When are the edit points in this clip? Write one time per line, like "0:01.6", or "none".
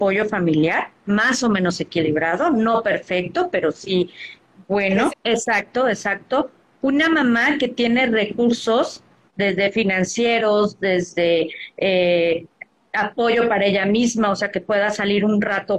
0:05.1

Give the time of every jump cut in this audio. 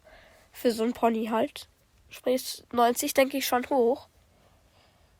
none

